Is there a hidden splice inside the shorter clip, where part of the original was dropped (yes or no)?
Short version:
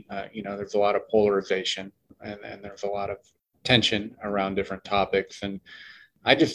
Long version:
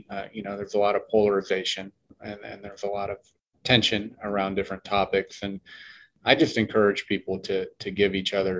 no